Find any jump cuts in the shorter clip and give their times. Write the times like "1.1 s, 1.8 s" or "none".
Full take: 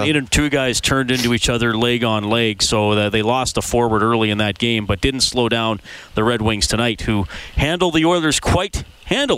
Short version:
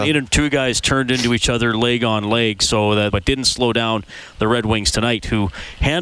3.1 s